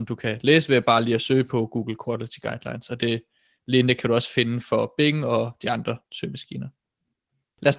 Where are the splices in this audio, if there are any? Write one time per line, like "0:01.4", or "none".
none